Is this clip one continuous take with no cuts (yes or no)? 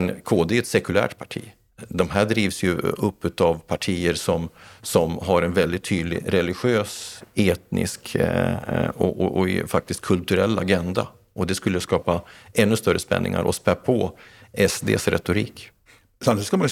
yes